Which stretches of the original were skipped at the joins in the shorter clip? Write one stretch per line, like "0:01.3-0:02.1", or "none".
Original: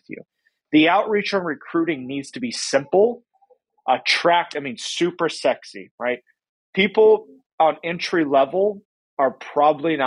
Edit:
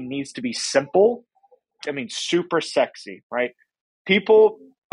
0:03.8-0:04.5